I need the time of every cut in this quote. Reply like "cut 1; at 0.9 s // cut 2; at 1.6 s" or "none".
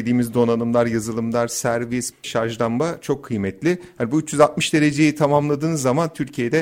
cut 1; at 2.1 s